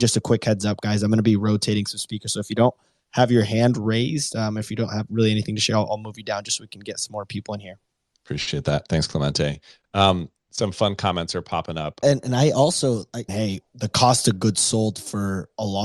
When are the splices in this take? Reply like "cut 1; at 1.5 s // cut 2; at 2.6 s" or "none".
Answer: cut 1; at 12.0 s // cut 2; at 13.3 s